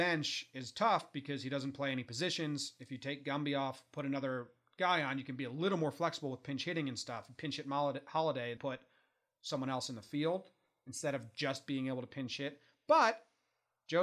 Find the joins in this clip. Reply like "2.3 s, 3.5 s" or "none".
8.6 s